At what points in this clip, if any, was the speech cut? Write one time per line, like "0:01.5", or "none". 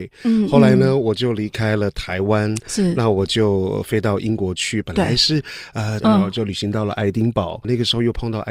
0:06.0

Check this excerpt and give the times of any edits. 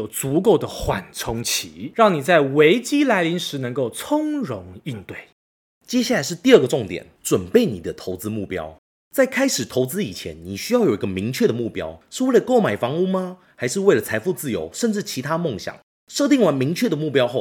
none

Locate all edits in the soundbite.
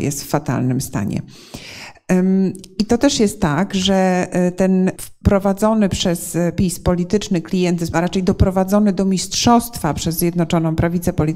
0:05.0

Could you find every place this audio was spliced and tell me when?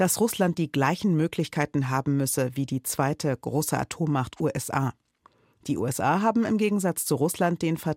none

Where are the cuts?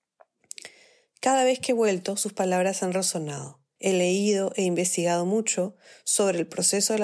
0:03.8

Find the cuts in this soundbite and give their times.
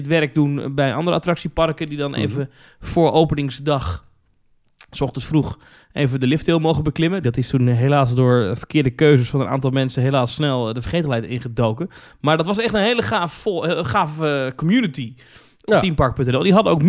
0:07.2

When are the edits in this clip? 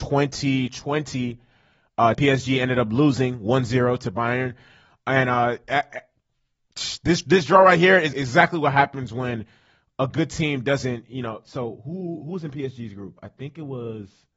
0:02.1
0:08.1

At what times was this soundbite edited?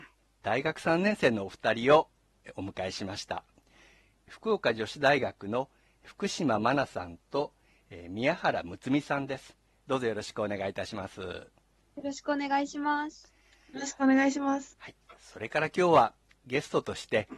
0:14.7

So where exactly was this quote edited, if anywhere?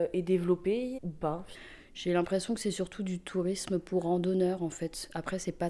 0:01.0

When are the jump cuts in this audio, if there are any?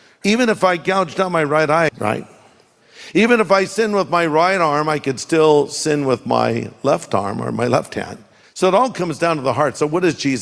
0:01.9
0:08.4

